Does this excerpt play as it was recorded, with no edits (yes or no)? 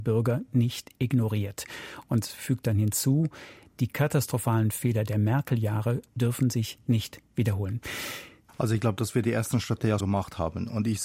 no